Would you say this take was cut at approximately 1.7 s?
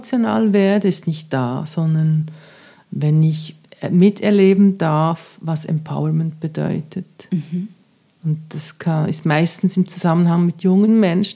no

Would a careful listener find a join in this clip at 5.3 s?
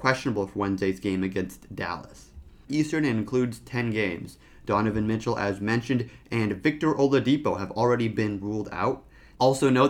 no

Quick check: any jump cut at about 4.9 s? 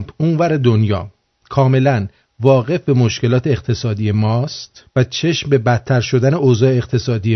yes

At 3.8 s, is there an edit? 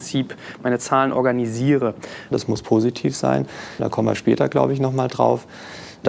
yes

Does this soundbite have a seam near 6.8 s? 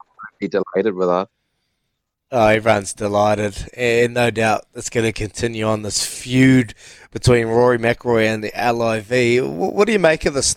no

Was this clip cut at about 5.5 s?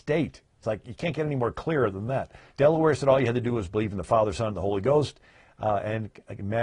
no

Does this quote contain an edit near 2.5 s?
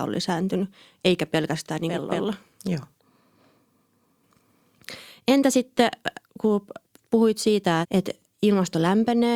no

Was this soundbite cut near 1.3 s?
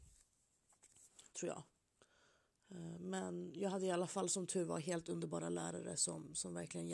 no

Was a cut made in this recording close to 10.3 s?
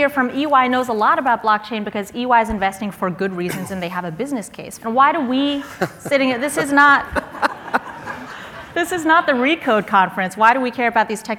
no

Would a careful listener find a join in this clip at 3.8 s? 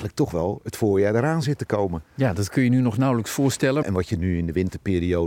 yes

